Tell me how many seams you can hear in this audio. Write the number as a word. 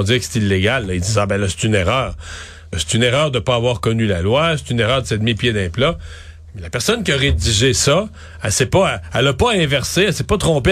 one